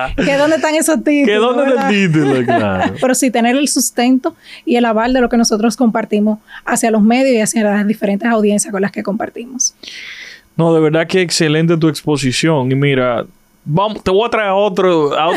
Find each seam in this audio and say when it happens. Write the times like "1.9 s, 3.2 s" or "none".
3.0 s